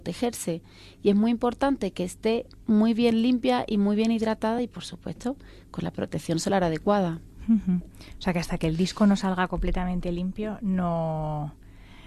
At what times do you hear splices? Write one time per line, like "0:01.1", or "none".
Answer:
none